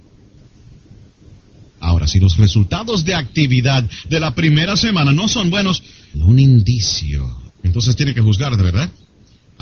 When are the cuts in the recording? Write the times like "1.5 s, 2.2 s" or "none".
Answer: 1.7 s, 6.1 s, 7.5 s

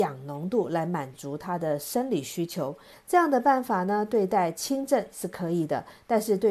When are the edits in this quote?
2.9 s

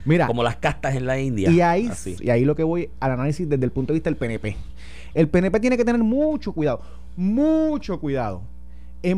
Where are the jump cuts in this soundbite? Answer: 2.2 s

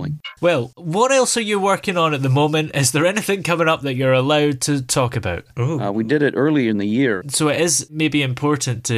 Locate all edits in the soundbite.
5.5 s, 7.2 s

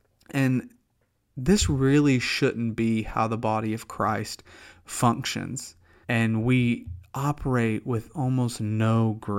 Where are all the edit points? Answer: 6.0 s

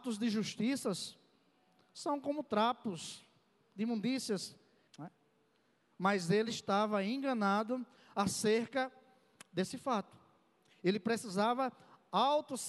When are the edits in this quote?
4.9 s

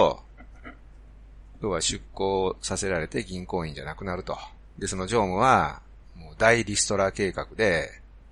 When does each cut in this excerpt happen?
4.8 s

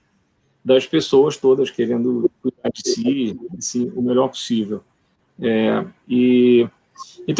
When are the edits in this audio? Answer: 5.3 s

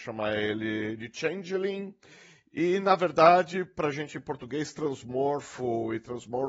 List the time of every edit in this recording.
none

